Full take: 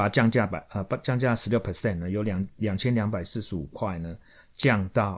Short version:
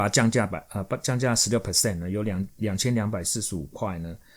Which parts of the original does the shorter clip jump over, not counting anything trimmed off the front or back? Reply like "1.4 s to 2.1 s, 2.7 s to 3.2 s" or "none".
none